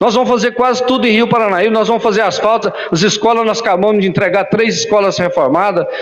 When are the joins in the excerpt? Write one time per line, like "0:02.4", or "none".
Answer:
0:02.6